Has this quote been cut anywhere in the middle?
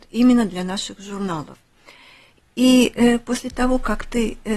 no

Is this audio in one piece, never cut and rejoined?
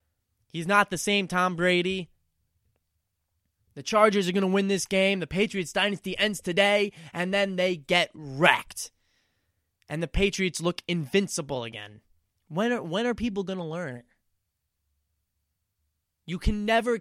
yes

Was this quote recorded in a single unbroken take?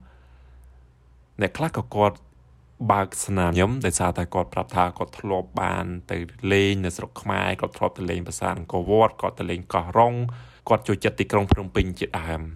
no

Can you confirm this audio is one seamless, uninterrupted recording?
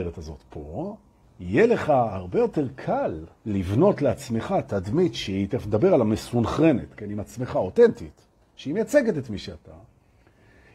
no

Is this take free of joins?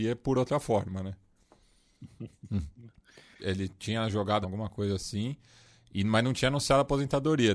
no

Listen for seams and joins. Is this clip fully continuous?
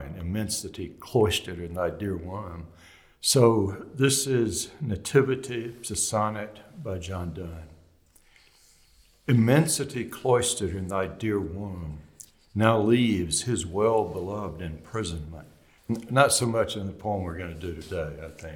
no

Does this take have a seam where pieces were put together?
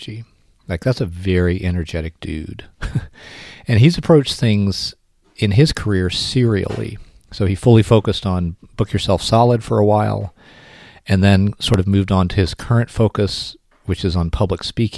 no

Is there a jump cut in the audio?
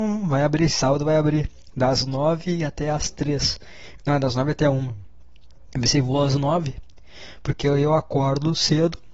yes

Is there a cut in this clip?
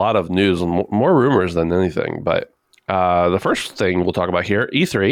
no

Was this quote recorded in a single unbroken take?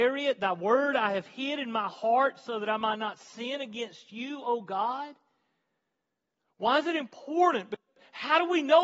yes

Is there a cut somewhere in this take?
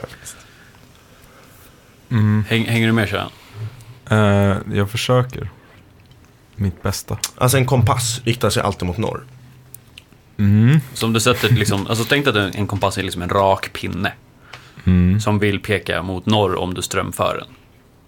no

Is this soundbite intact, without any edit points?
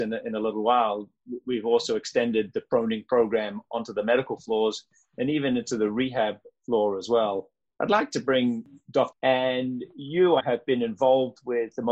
no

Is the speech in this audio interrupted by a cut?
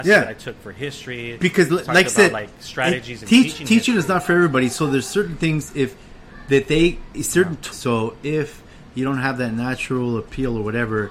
yes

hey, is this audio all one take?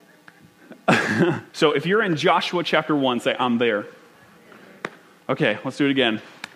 no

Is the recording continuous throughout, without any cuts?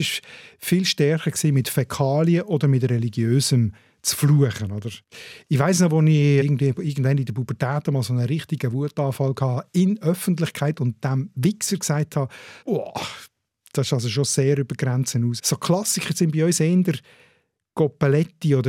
no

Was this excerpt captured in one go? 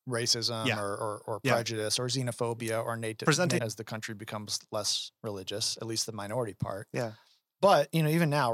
no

